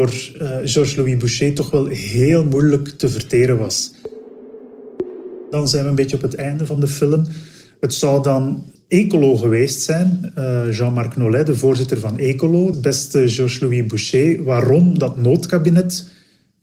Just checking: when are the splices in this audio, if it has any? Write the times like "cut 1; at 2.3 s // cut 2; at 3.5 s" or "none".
cut 1; at 12.7 s